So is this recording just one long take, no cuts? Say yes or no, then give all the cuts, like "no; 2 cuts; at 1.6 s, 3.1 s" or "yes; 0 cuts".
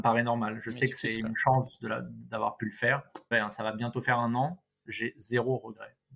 no; 1 cut; at 3.3 s